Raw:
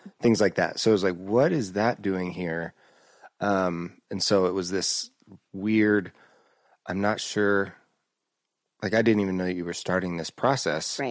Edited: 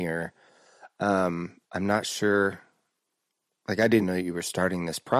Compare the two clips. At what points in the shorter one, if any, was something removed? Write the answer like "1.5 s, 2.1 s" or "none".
1.6 s, 4.0 s